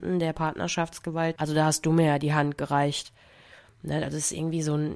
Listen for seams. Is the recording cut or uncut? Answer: cut